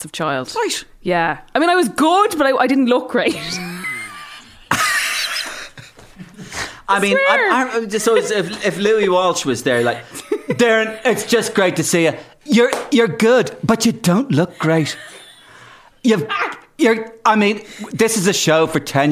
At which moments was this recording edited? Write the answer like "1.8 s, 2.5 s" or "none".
none